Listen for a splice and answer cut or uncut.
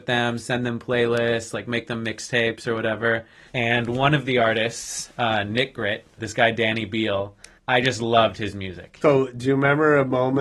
cut